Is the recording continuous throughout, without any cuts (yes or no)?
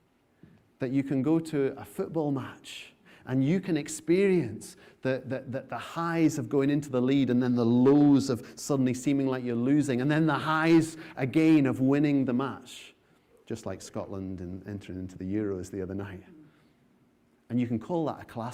yes